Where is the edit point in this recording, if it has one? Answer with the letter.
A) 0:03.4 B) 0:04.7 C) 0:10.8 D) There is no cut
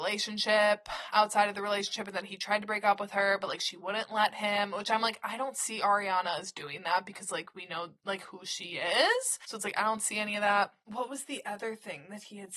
D